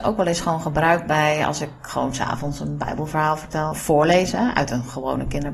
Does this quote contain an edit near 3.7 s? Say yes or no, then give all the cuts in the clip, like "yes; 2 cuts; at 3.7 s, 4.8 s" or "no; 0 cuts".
yes; 1 cut; at 3.7 s